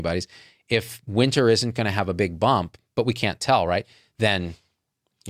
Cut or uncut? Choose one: uncut